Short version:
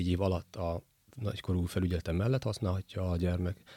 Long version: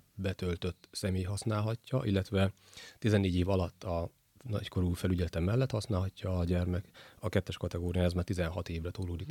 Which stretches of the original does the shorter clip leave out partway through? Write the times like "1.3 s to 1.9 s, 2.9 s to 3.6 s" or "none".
none